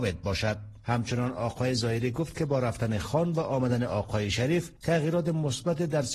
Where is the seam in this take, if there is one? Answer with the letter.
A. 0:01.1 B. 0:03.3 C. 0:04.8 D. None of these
C